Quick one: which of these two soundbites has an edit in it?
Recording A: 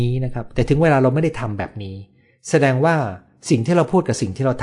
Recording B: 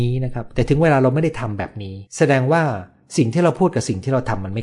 B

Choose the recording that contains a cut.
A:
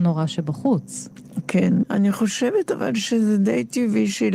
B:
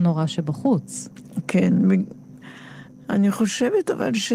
A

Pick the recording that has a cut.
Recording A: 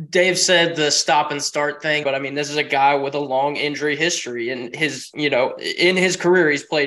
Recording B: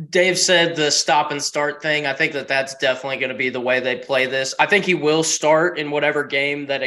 A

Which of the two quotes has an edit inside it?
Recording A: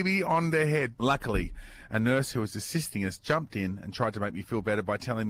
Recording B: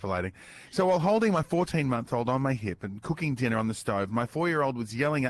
A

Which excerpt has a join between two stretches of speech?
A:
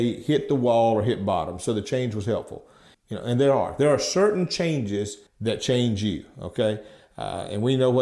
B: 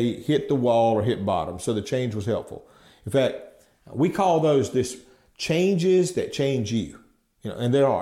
A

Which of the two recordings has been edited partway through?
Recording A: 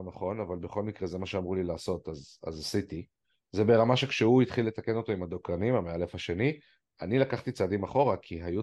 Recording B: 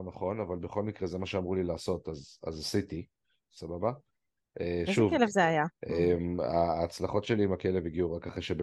B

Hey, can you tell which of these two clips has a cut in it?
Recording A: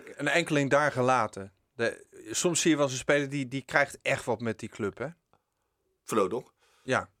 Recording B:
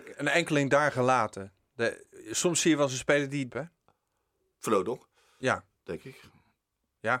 B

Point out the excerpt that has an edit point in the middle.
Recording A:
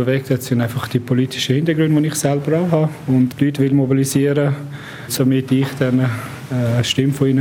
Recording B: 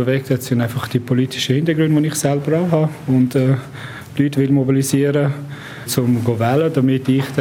A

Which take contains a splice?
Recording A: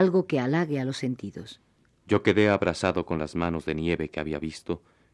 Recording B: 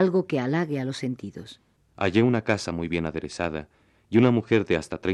B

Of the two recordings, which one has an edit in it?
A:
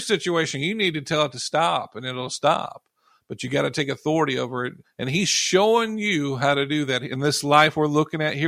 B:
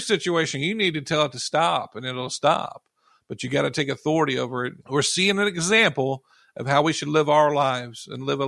B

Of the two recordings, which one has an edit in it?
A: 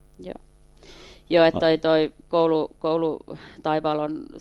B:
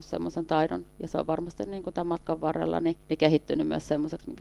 B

